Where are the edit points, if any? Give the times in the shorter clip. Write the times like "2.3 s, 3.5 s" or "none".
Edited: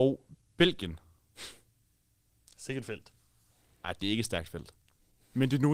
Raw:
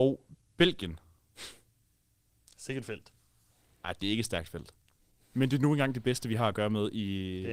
none

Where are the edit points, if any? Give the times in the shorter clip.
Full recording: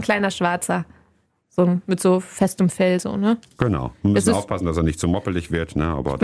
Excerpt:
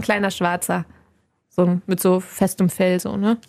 none

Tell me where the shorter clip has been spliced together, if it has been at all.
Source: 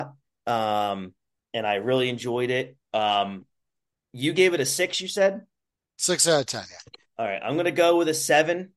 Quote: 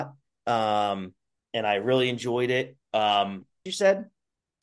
3.7 s

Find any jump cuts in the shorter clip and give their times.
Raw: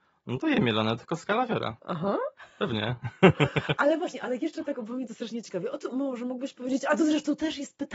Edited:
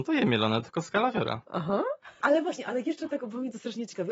2.2 s

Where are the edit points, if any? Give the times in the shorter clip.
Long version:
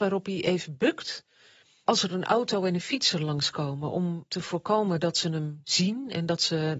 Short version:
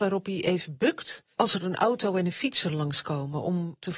1.3 s

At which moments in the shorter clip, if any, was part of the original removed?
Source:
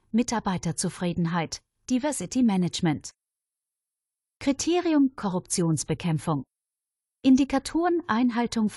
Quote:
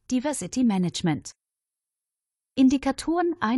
2.5 s

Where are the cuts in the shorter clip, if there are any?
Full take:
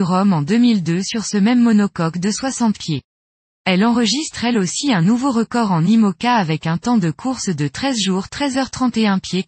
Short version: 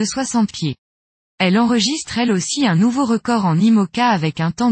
none

